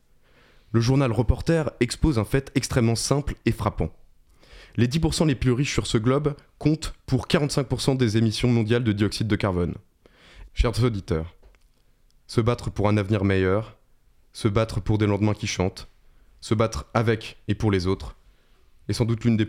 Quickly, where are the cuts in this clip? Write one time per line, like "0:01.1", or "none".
0:10.5